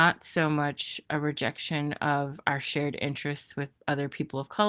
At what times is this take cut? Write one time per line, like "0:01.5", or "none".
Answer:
0:03.8